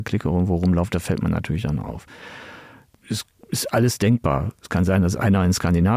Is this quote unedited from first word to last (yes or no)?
yes